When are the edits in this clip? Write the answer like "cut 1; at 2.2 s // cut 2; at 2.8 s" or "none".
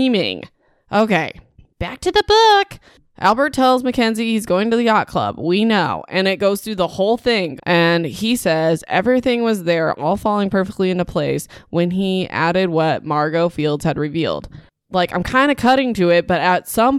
cut 1; at 7.6 s

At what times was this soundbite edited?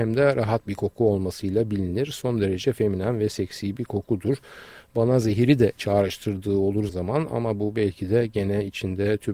cut 1; at 2.1 s // cut 2; at 6.9 s

